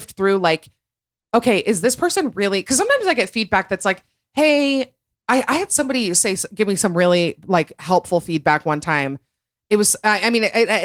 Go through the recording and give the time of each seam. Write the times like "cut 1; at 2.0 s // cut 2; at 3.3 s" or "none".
cut 1; at 5.1 s